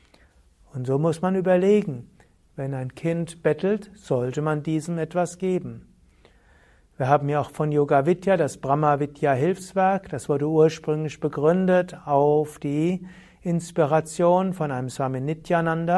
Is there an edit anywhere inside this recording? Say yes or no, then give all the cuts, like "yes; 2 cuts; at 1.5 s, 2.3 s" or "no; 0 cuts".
no; 0 cuts